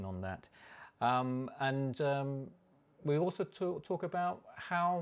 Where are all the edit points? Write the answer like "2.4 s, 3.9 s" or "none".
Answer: none